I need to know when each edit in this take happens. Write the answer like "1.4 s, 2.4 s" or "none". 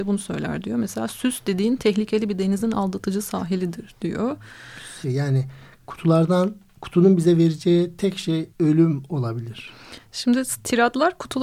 5.0 s, 8.5 s